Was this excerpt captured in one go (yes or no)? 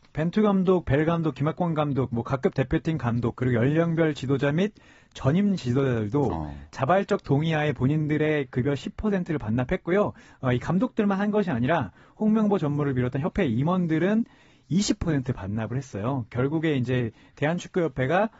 yes